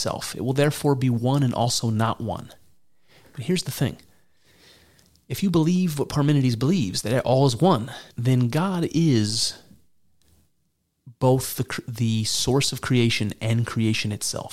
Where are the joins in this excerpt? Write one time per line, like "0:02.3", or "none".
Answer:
0:08.1

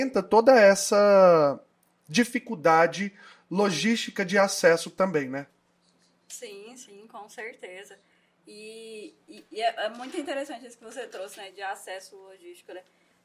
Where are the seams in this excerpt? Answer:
none

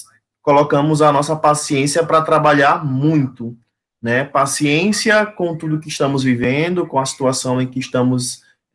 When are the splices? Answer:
none

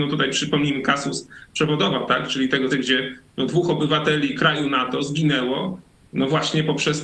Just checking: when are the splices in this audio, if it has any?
0:02.7

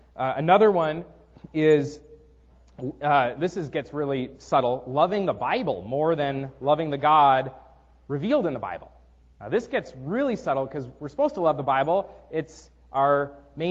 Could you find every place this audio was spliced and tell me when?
none

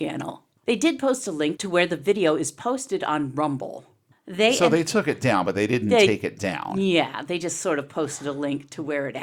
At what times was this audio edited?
none

